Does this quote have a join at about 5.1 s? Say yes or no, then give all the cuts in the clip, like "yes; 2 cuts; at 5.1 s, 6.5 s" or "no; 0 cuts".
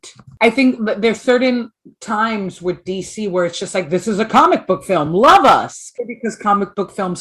no; 0 cuts